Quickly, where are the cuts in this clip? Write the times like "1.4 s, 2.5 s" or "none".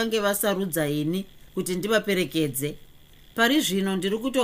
none